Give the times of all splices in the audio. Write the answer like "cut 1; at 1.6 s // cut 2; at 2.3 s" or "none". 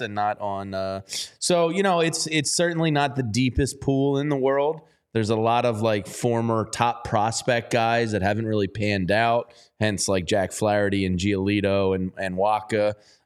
none